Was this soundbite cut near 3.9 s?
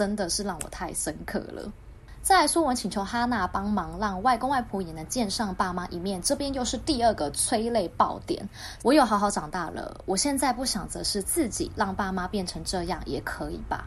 no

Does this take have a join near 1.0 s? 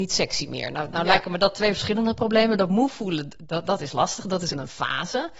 no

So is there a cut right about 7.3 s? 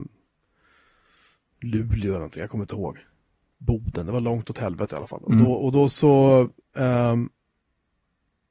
no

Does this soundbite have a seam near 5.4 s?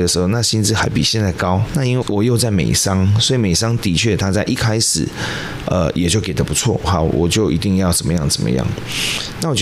no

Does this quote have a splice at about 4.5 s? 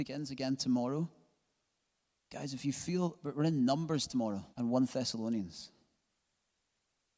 yes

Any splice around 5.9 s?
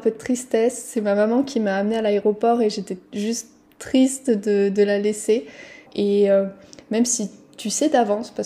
yes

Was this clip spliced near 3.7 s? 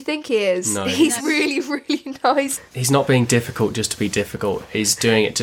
no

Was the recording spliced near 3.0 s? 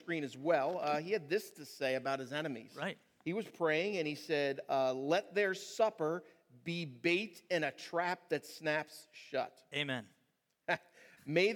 no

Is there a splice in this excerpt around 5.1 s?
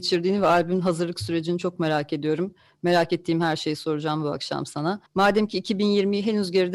yes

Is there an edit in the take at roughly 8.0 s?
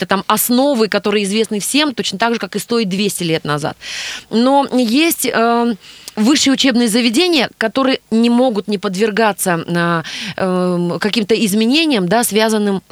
yes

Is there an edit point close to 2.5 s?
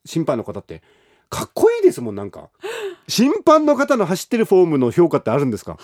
yes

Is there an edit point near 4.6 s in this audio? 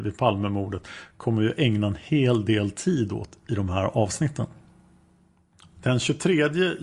no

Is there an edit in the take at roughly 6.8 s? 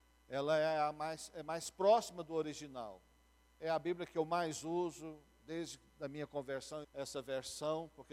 yes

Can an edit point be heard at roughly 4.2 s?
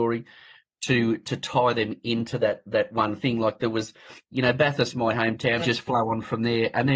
yes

